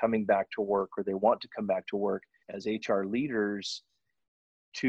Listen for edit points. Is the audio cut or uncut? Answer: cut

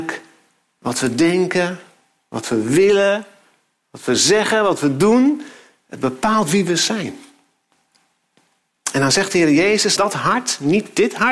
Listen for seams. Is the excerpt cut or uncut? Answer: cut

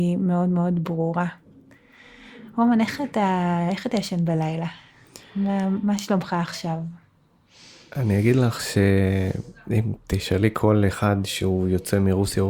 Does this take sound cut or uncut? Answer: uncut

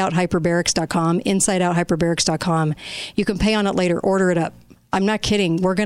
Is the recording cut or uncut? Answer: uncut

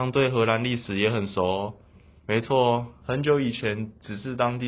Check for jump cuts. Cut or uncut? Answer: cut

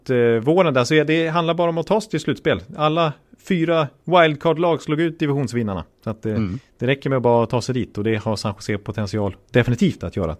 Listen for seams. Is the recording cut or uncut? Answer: cut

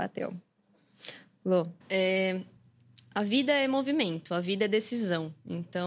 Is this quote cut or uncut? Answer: uncut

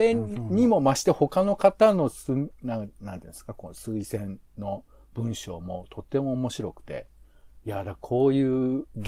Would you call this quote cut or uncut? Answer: cut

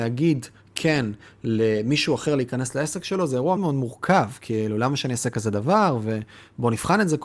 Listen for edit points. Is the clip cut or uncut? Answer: cut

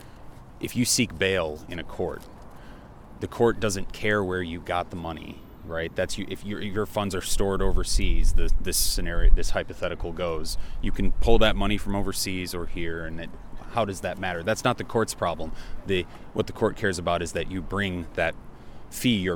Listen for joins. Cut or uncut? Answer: uncut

